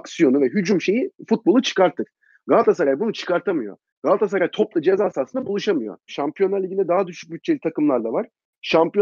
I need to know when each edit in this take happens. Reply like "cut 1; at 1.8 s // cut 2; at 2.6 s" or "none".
cut 1; at 6.1 s